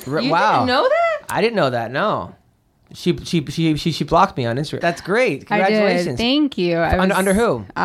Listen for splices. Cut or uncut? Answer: cut